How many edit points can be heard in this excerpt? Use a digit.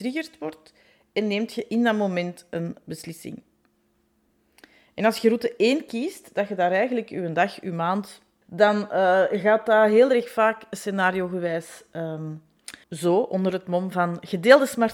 2